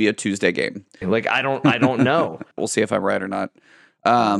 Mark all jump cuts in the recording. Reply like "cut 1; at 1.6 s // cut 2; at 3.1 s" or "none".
cut 1; at 1.0 s // cut 2; at 2.6 s

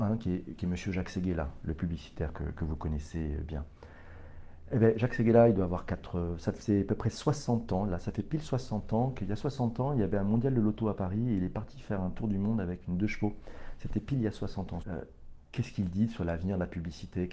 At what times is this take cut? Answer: cut 1; at 14.8 s

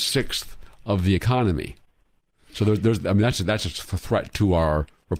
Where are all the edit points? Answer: none

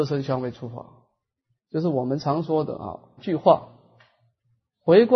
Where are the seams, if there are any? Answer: cut 1; at 1.6 s // cut 2; at 3.2 s

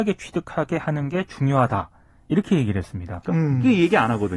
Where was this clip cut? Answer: cut 1; at 3.2 s

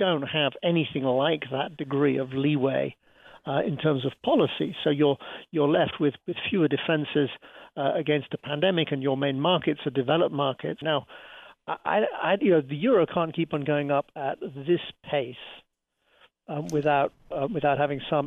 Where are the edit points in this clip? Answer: cut 1; at 10.8 s

